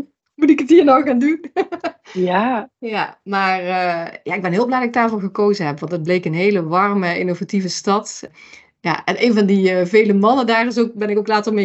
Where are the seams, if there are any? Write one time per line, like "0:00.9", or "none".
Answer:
none

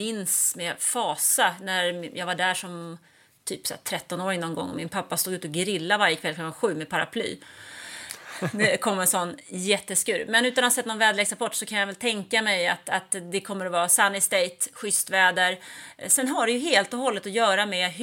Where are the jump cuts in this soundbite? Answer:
none

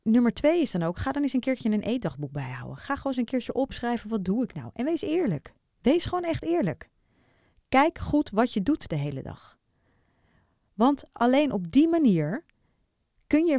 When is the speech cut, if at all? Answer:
none

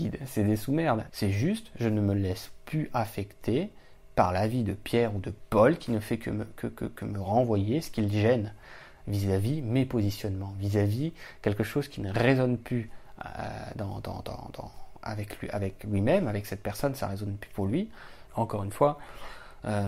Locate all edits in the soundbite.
0:01.1
0:18.3

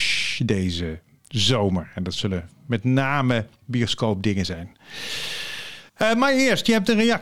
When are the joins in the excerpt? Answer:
0:05.9

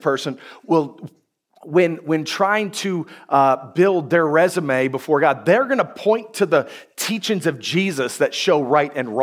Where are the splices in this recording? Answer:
none

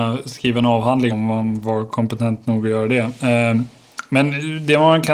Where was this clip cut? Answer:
0:01.1

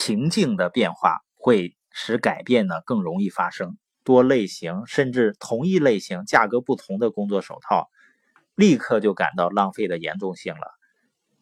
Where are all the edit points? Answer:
0:03.9

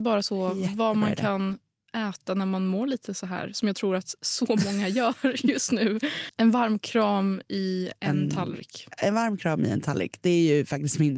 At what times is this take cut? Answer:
0:06.3

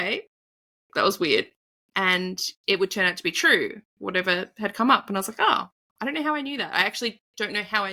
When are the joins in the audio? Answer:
none

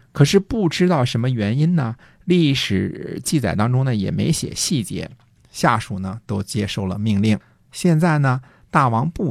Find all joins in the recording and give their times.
0:05.4
0:07.7

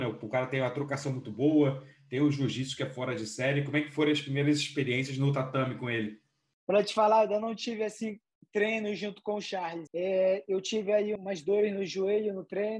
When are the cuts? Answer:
0:09.9
0:11.2

